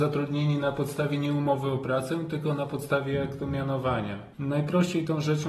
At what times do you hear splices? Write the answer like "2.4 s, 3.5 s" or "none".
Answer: 4.3 s